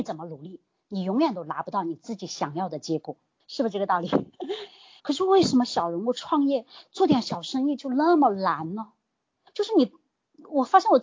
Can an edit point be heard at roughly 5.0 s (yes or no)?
yes